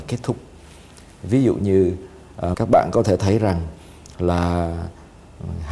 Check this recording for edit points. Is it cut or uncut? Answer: cut